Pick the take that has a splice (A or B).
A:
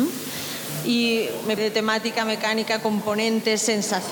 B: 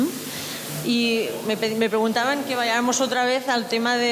A